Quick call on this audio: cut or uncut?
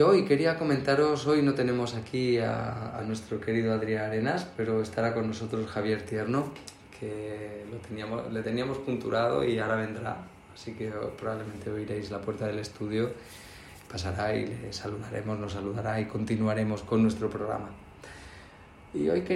uncut